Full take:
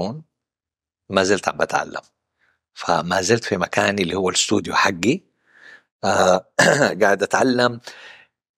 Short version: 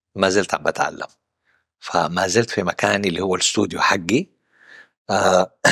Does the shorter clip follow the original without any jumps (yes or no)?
yes